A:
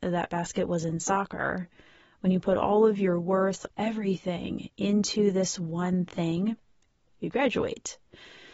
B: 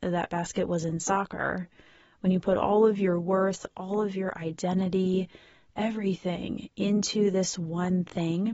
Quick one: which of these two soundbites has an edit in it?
A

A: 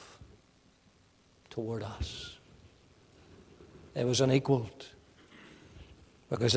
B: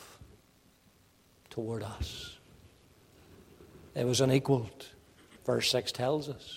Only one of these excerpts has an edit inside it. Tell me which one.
B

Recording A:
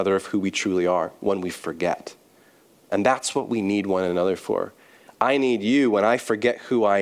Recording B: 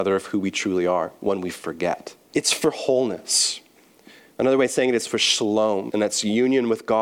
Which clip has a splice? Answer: B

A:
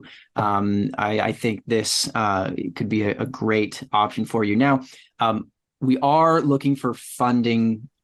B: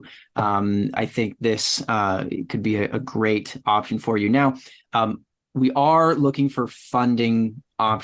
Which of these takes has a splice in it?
B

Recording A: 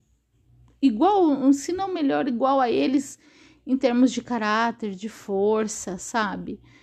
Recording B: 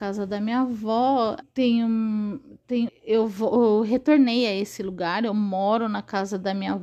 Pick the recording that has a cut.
B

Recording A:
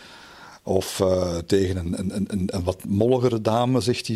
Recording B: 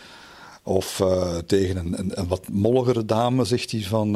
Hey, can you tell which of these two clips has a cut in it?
B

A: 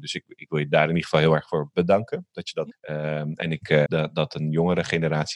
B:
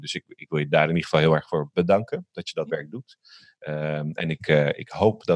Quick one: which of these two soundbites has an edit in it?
A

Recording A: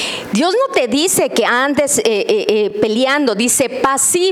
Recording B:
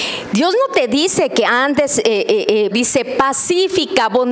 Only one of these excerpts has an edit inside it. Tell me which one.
B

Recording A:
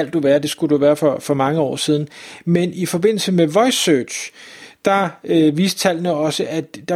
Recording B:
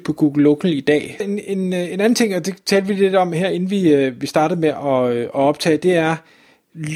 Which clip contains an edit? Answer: B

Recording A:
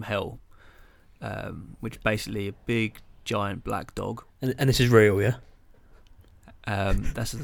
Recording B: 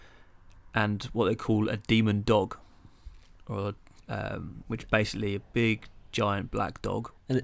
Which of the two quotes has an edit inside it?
B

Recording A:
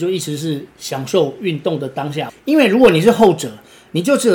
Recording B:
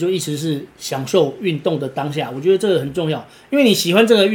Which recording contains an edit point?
A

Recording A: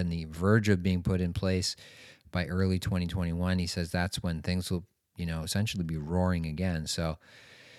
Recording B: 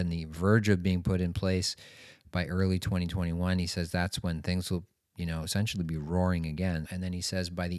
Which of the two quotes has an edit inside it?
B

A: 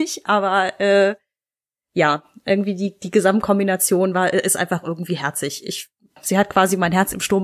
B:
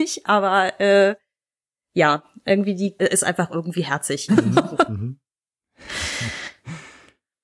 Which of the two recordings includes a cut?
B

